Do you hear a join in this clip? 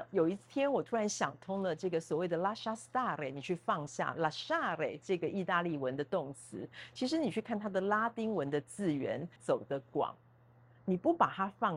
yes; 1 cut; at 9.4 s

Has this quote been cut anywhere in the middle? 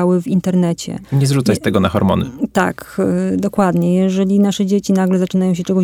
no; 0 cuts

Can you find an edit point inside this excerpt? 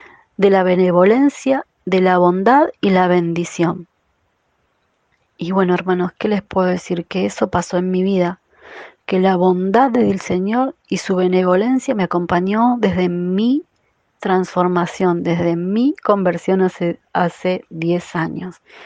no; 0 cuts

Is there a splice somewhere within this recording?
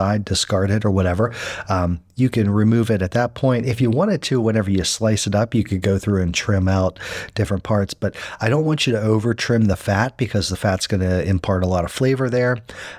no; 0 cuts

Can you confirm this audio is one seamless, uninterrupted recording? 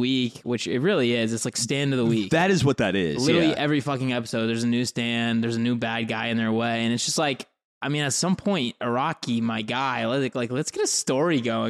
yes; 0 cuts

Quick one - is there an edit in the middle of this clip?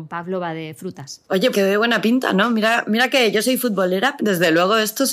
yes; 2 cuts; at 1.5 s, 4.2 s

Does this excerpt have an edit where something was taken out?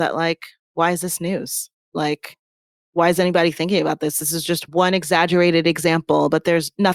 no; 0 cuts

